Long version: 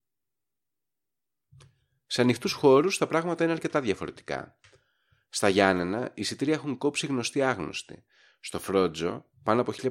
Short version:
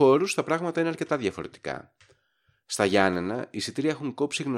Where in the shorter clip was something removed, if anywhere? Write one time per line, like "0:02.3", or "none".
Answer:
none